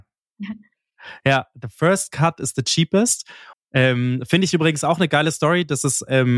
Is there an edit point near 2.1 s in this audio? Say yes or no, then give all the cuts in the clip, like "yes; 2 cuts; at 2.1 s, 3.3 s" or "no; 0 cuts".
no; 1 cut; at 3.5 s